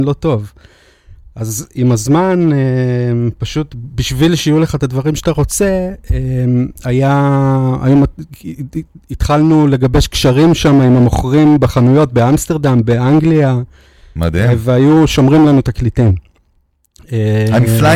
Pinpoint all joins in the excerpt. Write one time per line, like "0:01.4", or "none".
none